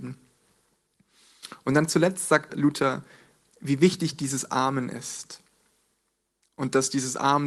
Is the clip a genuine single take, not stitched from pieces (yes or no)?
no